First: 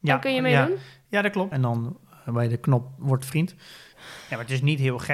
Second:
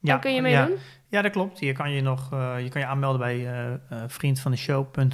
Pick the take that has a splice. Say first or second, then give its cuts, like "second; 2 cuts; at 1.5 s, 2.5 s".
first; 2 cuts; at 1.5 s, 3.9 s